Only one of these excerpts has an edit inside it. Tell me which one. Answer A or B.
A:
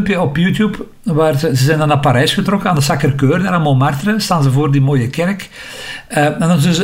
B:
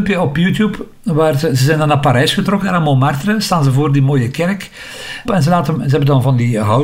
B